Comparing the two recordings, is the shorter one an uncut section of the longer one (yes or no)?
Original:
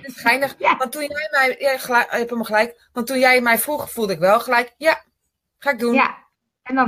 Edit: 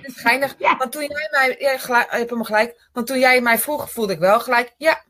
yes